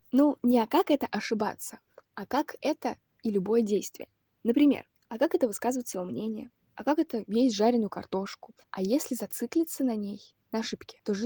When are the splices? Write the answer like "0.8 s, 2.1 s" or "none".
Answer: 8.6 s